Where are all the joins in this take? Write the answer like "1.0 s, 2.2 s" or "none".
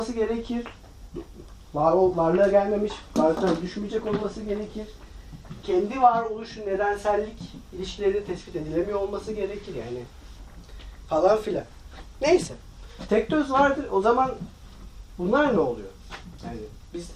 3.1 s, 13.1 s